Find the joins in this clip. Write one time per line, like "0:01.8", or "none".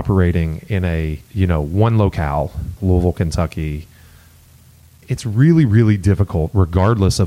0:01.2
0:02.8